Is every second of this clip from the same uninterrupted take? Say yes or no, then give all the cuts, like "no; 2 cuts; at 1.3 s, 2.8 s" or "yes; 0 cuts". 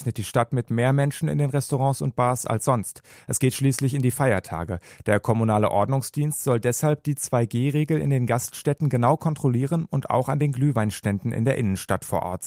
yes; 0 cuts